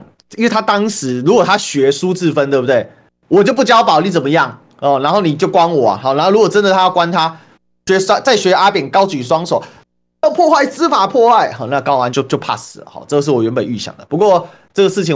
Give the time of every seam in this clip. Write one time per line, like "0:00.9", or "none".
0:12.1